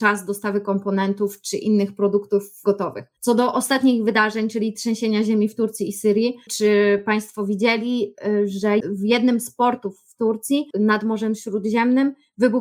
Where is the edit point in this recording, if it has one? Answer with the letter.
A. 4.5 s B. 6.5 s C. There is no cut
B